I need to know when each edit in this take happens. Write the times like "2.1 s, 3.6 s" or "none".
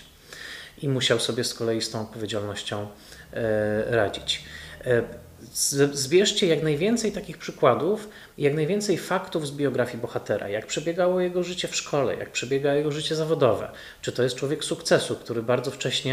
none